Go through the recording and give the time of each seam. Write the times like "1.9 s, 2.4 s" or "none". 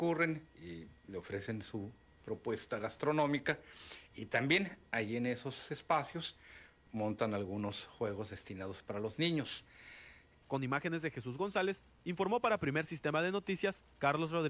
2.2 s, 10.4 s